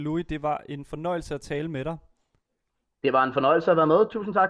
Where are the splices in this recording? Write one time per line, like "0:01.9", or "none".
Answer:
none